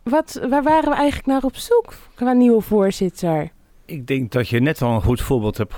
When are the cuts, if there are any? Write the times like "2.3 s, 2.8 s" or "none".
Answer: none